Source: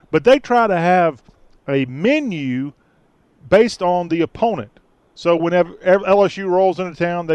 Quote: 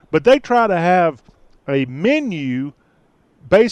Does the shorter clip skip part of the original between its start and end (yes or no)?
no